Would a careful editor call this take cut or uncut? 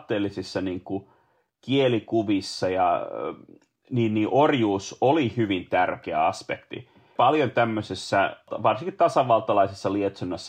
uncut